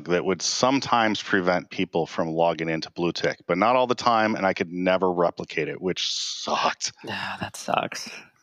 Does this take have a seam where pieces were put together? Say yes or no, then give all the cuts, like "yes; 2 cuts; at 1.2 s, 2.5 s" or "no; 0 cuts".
no; 0 cuts